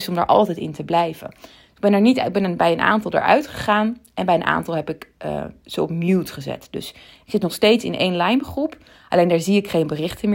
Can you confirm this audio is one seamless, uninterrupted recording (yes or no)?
yes